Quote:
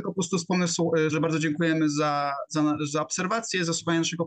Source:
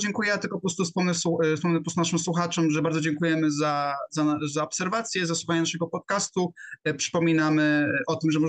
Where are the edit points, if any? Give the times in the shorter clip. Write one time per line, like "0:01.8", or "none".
0:01.1